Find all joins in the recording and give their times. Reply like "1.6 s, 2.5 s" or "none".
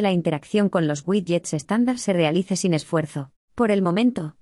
3.4 s